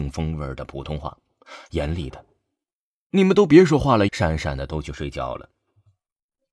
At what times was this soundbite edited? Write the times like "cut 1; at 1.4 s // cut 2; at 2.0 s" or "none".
cut 1; at 4.1 s